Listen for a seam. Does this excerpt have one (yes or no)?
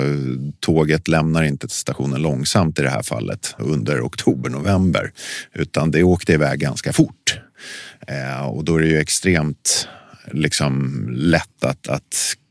yes